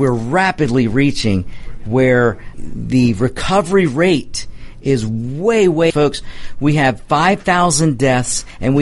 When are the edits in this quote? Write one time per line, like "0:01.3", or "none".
0:02.5
0:05.9